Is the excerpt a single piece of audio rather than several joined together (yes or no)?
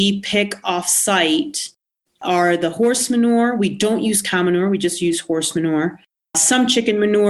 yes